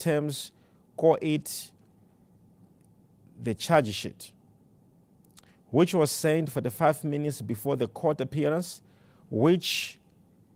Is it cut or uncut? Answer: uncut